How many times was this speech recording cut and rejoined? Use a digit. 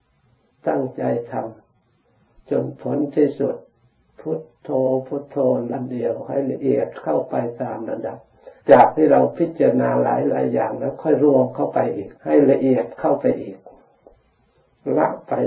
3